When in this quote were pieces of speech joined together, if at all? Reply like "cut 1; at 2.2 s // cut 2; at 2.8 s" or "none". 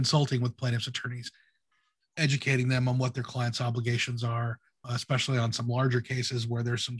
cut 1; at 4.8 s